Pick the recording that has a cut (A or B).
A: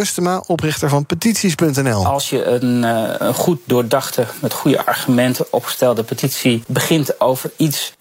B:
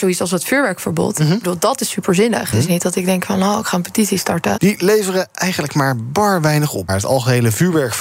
B